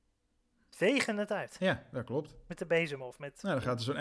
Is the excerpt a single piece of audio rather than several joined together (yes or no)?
yes